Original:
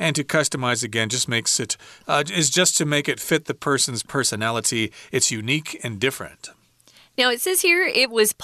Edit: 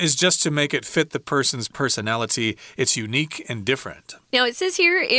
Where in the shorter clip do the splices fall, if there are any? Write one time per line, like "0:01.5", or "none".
0:04.2